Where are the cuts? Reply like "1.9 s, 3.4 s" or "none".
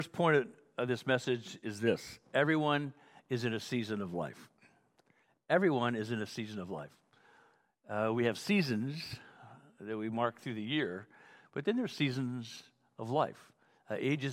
none

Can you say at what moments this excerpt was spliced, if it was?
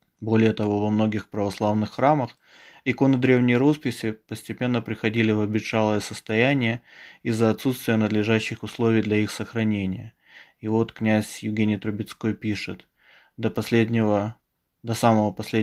none

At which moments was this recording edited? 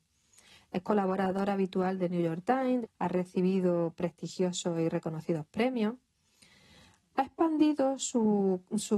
2.8 s

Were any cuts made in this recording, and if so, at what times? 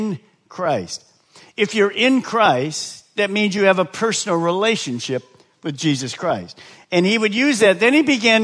none

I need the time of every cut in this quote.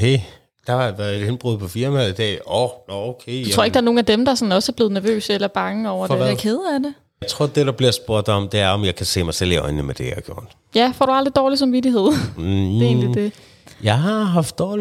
none

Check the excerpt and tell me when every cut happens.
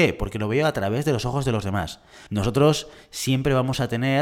2.3 s

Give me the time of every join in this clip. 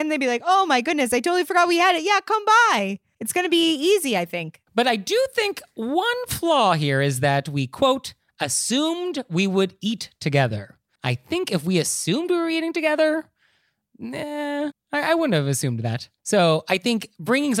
11.0 s, 14.7 s

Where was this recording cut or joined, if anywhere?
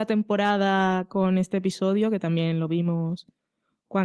none

